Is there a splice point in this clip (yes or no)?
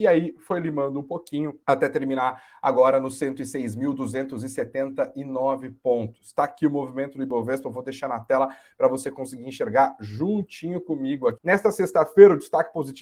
yes